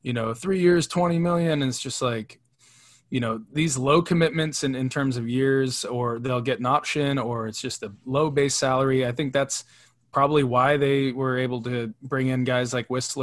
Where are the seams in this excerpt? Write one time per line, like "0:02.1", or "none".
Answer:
none